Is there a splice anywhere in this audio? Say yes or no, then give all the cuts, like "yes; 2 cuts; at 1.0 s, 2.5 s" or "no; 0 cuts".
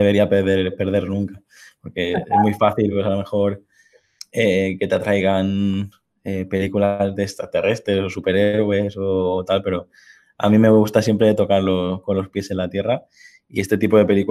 no; 0 cuts